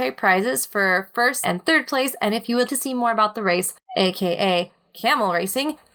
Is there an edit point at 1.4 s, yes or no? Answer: yes